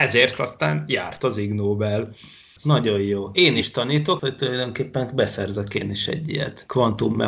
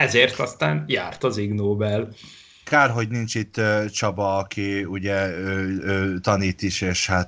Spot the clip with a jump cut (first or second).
first